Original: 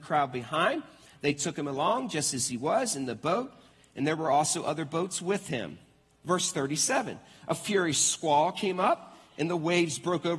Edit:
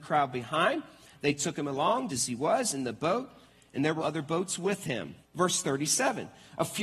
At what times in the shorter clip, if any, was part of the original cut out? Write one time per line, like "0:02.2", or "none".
0:02.1
0:04.0
0:05.2